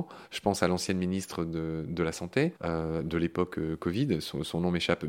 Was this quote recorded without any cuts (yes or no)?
no